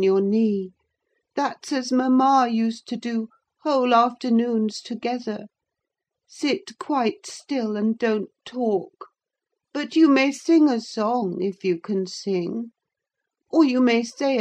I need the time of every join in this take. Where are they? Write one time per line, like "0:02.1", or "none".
none